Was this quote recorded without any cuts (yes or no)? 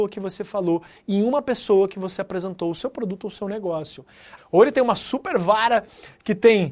no